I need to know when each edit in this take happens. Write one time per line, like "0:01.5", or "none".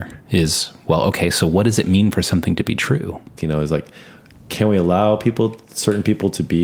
0:03.4